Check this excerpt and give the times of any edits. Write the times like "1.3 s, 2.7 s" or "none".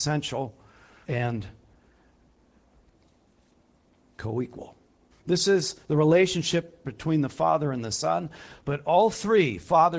1.0 s, 5.1 s, 6.8 s